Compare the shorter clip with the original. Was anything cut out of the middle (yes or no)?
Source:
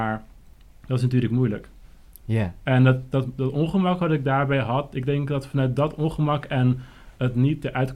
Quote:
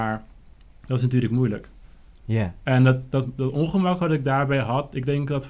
no